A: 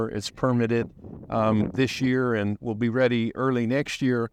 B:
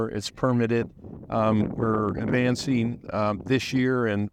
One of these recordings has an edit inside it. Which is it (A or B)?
A